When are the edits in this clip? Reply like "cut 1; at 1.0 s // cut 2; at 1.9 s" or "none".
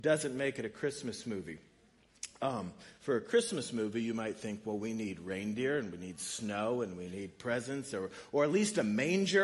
none